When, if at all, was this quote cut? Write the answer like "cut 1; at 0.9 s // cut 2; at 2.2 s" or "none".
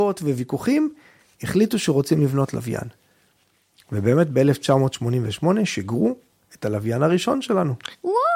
none